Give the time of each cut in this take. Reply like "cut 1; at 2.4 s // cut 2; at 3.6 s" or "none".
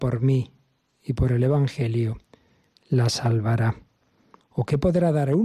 cut 1; at 4.4 s